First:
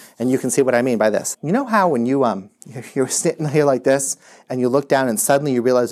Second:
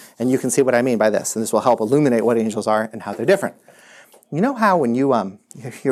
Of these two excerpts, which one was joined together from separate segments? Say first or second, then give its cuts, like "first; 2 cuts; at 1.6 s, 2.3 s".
first; 1 cut; at 1.3 s